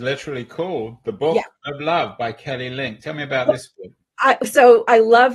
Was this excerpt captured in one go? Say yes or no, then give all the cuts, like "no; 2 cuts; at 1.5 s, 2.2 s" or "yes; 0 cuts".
yes; 0 cuts